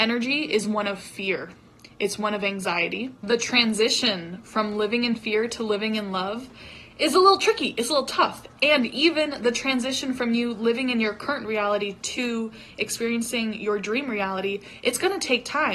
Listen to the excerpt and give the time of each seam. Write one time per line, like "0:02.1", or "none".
0:06.9

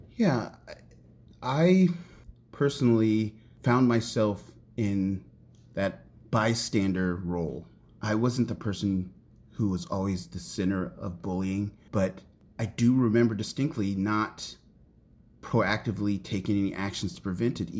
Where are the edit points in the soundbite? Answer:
none

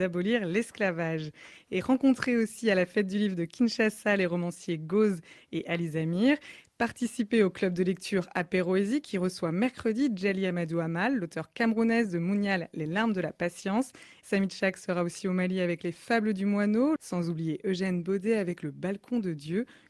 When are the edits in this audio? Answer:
0:14.2
0:17.0

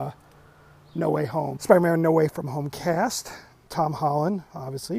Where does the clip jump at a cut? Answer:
0:01.6
0:03.7

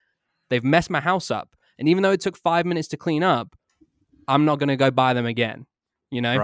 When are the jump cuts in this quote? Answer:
none

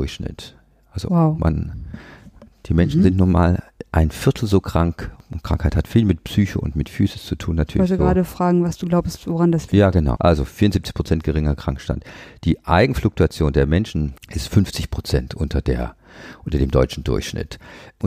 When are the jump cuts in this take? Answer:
0:10.2
0:14.2

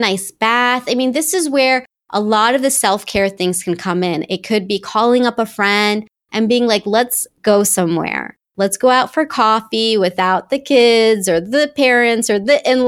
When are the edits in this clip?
none

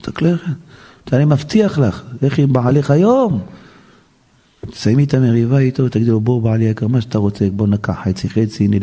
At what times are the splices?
none

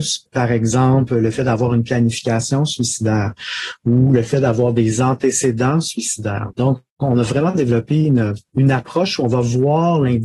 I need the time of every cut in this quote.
0:06.5

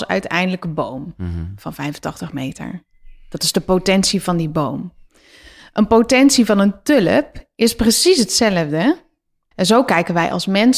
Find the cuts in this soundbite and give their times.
0:09.5

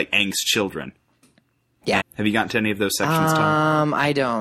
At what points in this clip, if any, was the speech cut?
0:02.0

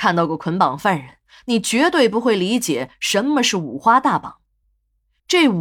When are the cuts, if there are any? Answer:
none

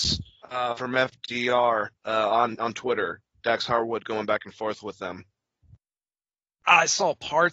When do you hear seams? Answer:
0:02.0

